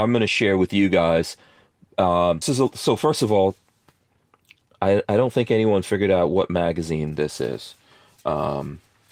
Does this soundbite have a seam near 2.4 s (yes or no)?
yes